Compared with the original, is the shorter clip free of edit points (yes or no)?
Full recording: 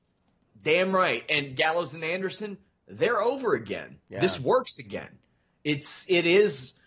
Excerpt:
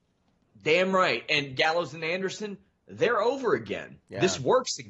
yes